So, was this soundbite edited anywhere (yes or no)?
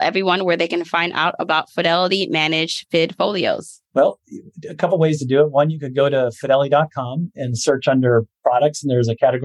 no